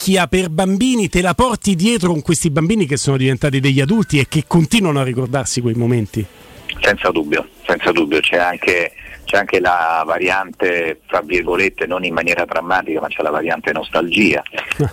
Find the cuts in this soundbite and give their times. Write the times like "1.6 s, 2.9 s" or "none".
none